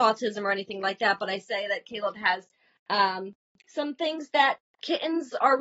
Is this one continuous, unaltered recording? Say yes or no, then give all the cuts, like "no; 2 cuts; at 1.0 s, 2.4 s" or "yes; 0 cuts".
yes; 0 cuts